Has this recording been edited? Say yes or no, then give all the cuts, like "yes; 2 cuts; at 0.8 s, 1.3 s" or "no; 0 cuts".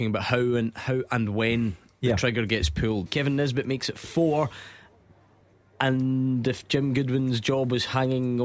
yes; 1 cut; at 3.1 s